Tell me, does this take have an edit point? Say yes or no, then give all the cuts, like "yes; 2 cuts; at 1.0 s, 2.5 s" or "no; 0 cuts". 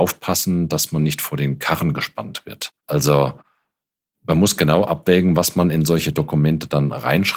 yes; 1 cut; at 2.8 s